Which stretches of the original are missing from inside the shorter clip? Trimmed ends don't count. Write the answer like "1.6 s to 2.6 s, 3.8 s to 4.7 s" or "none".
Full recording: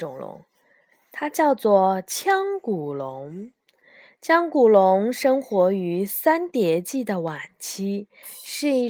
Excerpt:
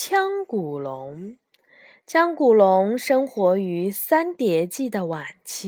none